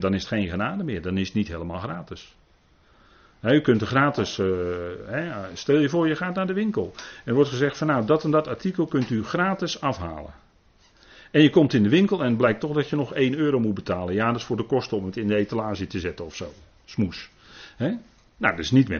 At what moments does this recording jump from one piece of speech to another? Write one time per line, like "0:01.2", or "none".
none